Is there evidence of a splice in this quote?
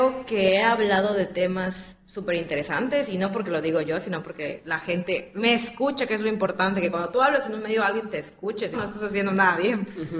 yes; 1 cut; at 8.7 s

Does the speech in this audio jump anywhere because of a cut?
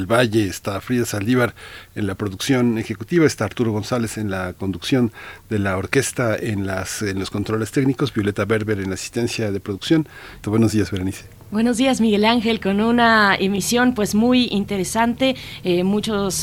yes; 1 cut; at 10.4 s

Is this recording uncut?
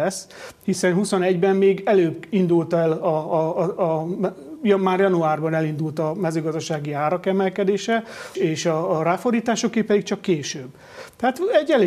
no; 1 cut; at 8.3 s

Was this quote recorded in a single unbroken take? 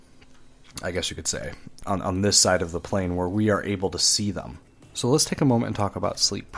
yes; 0 cuts

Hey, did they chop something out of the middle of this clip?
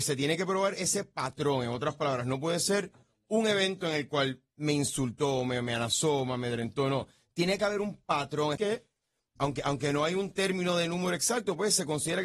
yes; 1 cut; at 8.6 s

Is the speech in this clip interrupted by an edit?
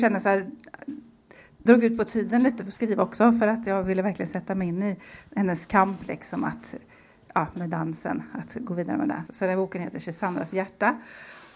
yes; 2 cuts; at 1.7 s, 9.3 s

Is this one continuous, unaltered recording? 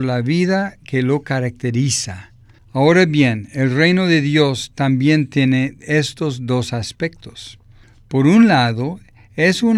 no; 1 cut; at 2.6 s

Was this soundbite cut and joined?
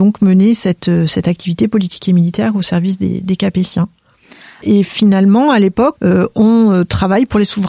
yes; 2 cuts; at 4.6 s, 6.0 s

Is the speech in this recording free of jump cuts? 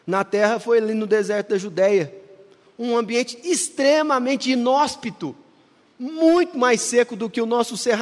yes; 0 cuts

